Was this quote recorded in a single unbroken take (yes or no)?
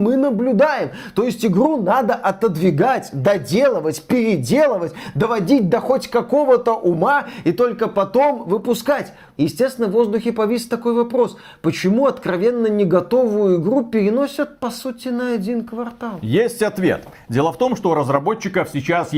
yes